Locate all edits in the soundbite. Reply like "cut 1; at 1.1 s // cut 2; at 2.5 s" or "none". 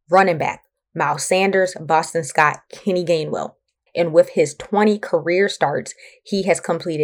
cut 1; at 3.9 s